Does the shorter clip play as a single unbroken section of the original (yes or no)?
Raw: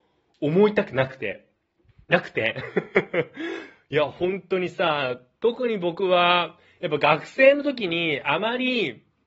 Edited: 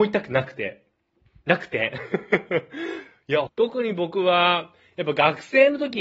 no